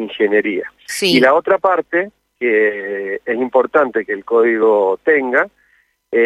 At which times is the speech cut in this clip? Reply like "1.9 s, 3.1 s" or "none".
none